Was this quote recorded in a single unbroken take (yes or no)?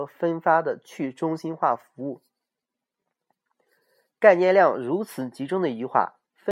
yes